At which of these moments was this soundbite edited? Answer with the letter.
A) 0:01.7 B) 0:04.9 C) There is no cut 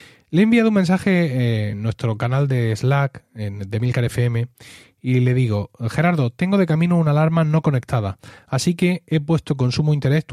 A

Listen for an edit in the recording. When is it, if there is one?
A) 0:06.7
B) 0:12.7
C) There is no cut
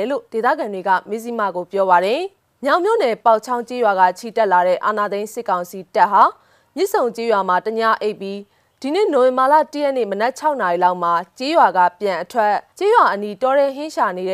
B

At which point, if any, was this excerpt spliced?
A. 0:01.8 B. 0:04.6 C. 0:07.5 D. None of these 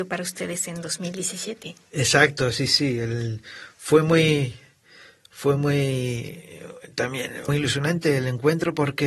C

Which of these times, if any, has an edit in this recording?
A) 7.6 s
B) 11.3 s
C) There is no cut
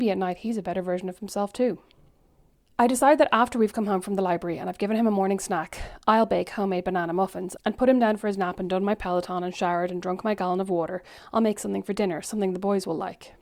A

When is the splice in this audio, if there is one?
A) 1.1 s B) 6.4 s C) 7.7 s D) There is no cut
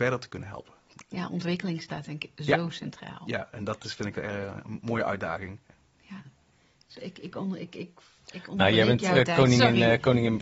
D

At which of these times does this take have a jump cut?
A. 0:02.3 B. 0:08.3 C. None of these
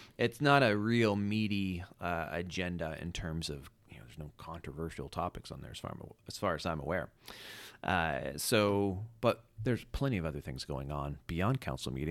C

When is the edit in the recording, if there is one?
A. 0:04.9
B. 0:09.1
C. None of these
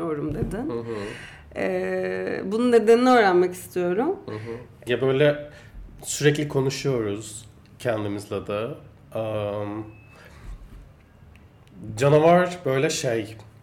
A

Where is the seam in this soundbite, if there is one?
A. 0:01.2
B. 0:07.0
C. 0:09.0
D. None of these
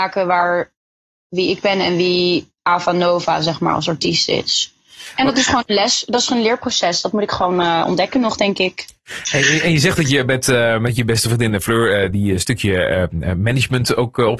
D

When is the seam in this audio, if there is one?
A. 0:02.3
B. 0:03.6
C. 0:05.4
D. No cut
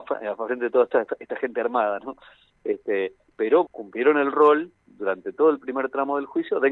B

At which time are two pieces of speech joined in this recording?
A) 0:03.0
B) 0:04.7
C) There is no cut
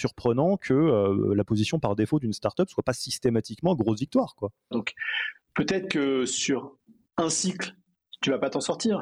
B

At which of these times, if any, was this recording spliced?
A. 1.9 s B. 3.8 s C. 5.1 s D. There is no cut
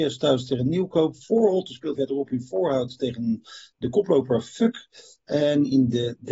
A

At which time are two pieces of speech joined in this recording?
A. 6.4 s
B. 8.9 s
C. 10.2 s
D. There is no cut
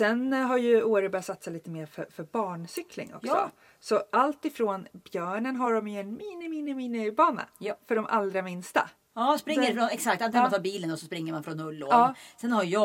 B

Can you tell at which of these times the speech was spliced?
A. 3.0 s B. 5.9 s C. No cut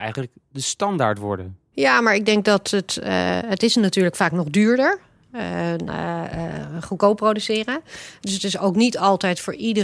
B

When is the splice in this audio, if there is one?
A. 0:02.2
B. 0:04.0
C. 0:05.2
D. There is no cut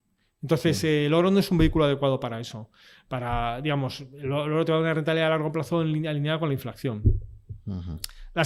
D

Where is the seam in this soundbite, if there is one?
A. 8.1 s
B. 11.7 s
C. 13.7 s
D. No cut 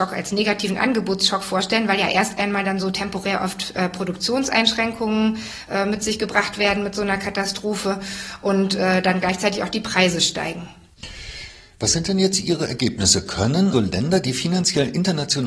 C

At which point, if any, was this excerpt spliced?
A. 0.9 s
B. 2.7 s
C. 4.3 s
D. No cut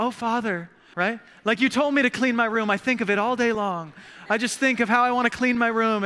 A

